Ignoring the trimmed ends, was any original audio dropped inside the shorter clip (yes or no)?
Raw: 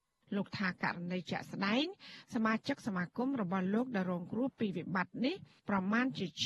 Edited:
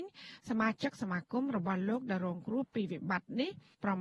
no